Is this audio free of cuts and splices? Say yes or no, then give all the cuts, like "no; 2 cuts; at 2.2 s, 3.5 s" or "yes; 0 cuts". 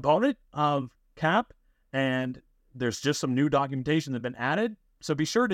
yes; 0 cuts